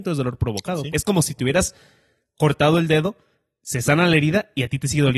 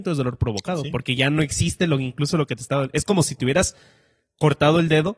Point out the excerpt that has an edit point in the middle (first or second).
first